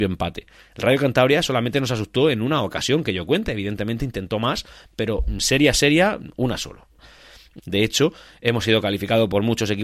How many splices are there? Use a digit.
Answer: 1